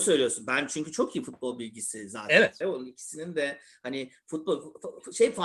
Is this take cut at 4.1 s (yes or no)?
no